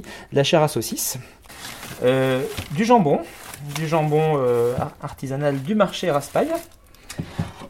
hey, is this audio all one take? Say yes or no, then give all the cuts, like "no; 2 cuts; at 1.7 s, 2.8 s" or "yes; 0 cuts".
yes; 0 cuts